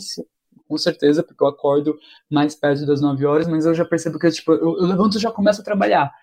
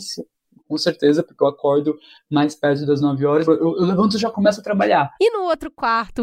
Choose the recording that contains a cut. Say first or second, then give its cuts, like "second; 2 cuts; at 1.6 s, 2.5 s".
second; 2 cuts; at 3.4 s, 5.2 s